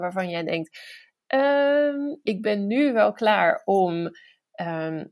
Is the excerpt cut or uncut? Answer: cut